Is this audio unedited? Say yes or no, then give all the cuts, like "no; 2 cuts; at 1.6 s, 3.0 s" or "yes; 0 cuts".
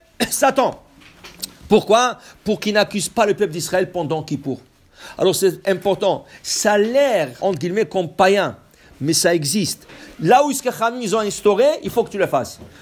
no; 1 cut; at 7.4 s